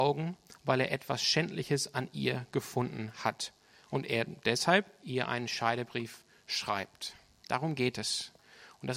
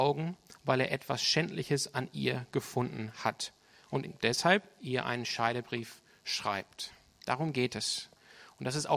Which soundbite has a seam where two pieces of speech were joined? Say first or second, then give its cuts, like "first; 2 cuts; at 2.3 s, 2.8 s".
second; 1 cut; at 4.0 s